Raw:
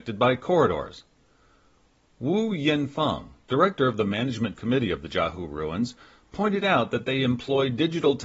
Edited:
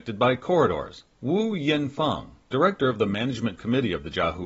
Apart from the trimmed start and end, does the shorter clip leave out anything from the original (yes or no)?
yes